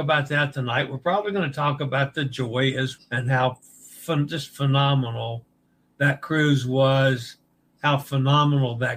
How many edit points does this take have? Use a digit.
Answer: 1